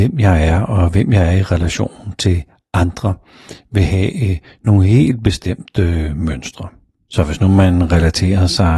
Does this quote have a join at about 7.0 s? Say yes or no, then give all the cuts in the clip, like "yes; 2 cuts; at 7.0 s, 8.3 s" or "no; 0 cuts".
yes; 1 cut; at 7.0 s